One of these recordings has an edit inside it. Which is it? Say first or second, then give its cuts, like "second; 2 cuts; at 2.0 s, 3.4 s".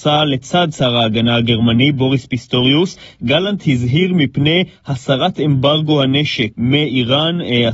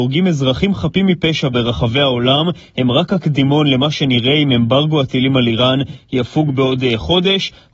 first; 1 cut; at 6.5 s